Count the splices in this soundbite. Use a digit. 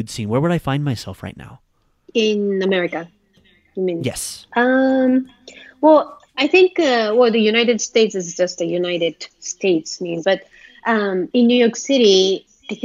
3